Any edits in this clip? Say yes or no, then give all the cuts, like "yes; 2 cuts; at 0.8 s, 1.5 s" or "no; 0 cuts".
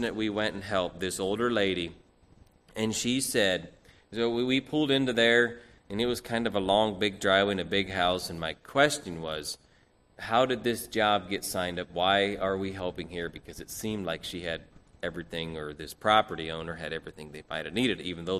no; 0 cuts